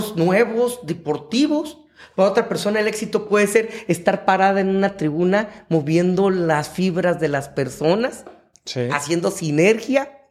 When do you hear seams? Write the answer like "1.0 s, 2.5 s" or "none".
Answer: none